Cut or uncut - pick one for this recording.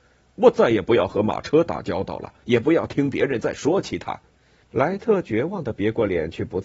cut